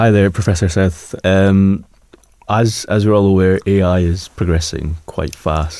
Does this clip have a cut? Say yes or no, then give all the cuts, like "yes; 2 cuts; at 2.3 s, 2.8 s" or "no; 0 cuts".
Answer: yes; 1 cut; at 1.2 s